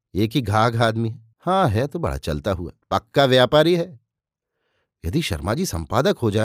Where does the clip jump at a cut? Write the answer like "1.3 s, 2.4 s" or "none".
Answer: 1.3 s, 2.8 s